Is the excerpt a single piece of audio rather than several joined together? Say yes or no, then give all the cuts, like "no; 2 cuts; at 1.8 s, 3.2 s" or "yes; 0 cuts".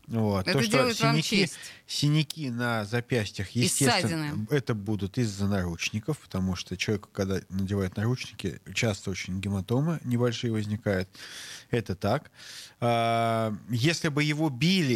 yes; 0 cuts